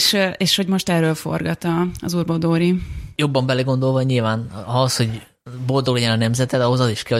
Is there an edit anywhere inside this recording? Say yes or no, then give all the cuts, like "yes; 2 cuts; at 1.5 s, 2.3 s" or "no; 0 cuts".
no; 0 cuts